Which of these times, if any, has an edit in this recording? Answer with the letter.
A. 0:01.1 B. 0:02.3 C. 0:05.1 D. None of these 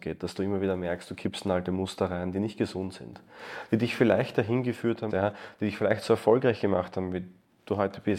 C